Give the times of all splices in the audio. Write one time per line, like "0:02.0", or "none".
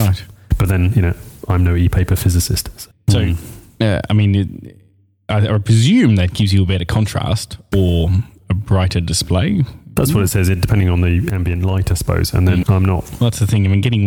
0:02.9
0:12.6